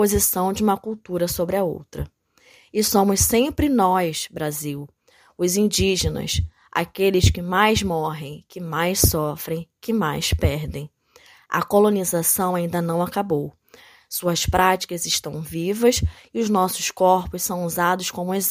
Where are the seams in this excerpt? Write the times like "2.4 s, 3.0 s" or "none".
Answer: none